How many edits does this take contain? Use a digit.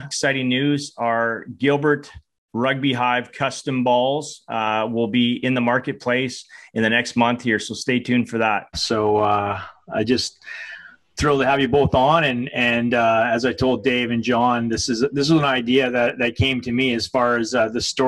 1